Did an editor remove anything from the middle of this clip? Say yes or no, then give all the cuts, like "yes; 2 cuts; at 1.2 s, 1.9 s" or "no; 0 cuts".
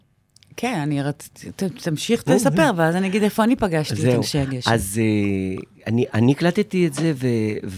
no; 0 cuts